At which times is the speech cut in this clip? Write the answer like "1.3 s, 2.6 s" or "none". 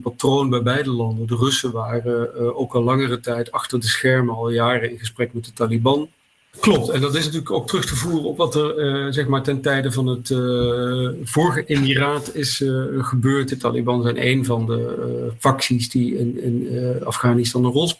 6.5 s, 13.5 s